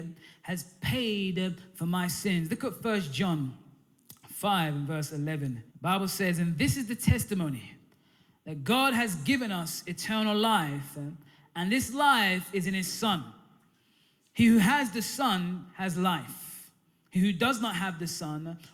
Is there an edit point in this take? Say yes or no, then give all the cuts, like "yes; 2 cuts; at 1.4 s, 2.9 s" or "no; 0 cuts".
yes; 1 cut; at 5.7 s